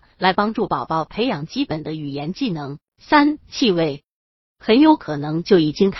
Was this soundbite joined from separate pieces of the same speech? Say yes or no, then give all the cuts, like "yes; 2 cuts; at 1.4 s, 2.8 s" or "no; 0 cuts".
yes; 2 cuts; at 2.9 s, 4.5 s